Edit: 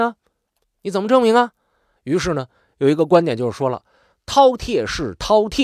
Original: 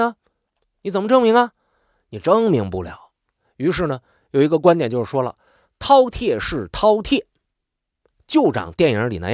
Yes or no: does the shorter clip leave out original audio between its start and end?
yes